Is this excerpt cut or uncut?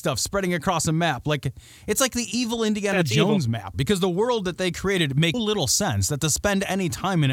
cut